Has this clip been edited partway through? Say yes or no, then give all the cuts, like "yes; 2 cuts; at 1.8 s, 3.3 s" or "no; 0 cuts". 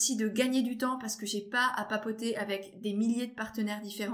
no; 0 cuts